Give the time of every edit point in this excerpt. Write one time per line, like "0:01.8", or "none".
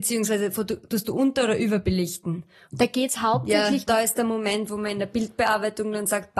0:02.6
0:03.9